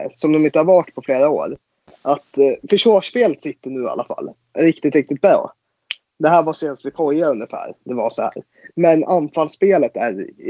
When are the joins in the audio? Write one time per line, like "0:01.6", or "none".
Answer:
none